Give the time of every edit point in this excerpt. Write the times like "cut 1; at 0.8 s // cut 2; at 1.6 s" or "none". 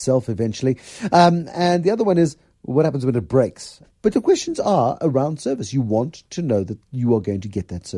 cut 1; at 3.8 s